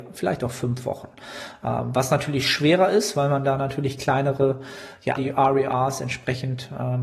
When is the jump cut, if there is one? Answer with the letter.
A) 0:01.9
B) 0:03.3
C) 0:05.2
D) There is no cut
C